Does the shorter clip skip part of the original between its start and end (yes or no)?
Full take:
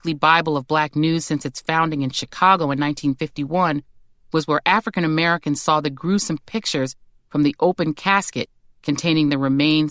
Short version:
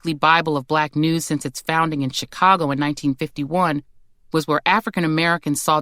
no